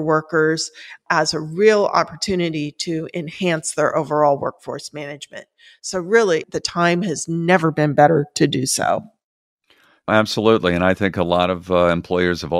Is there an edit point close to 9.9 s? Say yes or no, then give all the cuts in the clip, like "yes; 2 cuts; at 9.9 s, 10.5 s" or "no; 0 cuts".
no; 1 cut; at 6.4 s